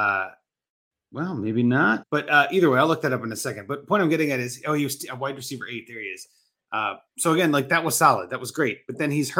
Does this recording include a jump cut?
yes; 1 cut; at 2.0 s

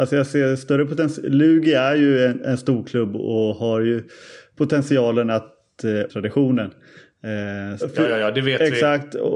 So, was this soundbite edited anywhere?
yes; 2 cuts; at 6.1 s, 7.8 s

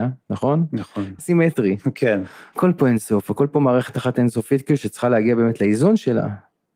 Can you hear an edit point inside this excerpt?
yes; 1 cut; at 1.2 s

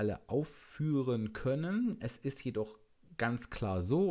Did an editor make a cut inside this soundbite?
no; 0 cuts

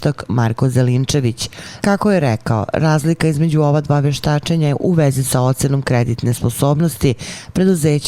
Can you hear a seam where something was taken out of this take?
yes; 1 cut; at 1.8 s

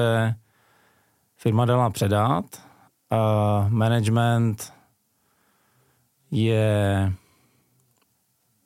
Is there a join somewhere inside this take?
no; 0 cuts

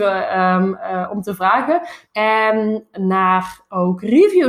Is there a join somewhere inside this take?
yes; 1 cut; at 2.0 s

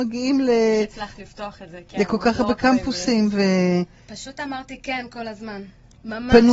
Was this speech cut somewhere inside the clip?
no; 0 cuts

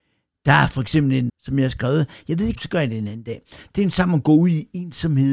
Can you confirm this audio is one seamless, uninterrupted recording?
no; 2 cuts; at 1.3 s, 2.5 s

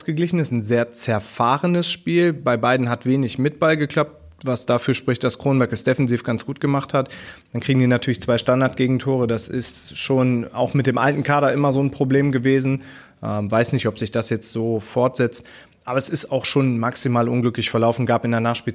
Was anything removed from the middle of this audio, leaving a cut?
no; 0 cuts

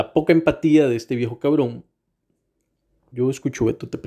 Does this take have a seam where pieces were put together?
yes; 1 cut; at 3.1 s

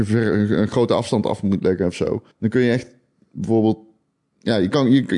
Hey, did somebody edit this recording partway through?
yes; 1 cut; at 2.3 s

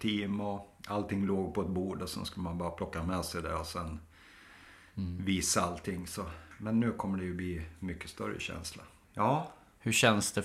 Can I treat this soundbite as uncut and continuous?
no; 1 cut; at 9.0 s

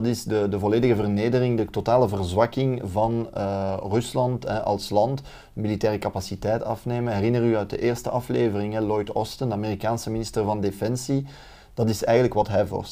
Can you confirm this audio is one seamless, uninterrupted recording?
yes; 0 cuts

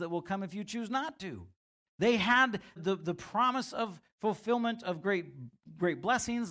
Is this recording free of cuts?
no; 1 cut; at 2.8 s

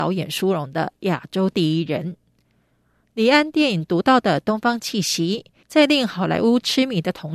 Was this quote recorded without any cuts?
no; 1 cut; at 5.6 s

